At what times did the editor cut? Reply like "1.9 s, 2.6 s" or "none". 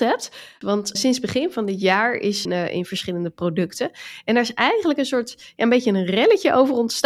0.9 s, 2.4 s